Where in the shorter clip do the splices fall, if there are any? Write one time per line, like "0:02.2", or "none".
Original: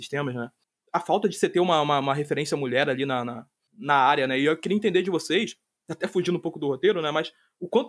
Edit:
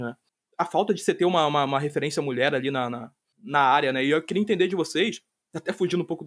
none